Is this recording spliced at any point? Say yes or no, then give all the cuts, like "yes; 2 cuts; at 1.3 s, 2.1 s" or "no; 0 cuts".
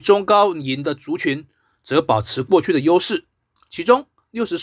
no; 0 cuts